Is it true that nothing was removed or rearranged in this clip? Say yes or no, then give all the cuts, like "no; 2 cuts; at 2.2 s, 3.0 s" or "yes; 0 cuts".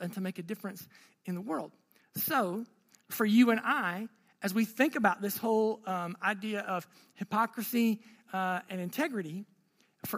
yes; 0 cuts